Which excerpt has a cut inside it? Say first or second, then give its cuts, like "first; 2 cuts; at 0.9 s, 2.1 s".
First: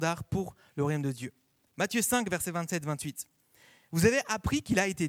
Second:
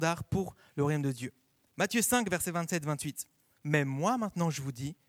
second; 1 cut; at 3.5 s